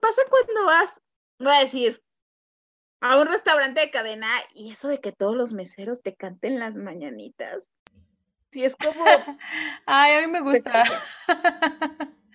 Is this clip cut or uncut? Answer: uncut